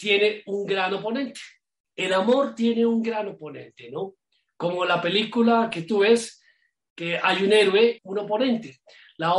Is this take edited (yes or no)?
yes